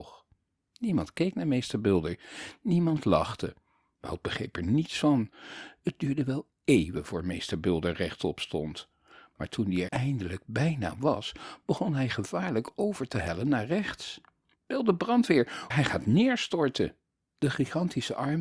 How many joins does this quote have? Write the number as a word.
three